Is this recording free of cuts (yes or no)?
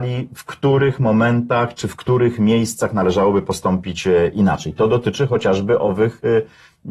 yes